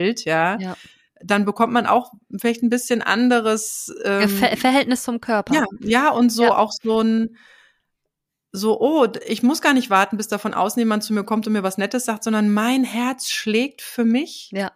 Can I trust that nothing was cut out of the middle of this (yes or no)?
yes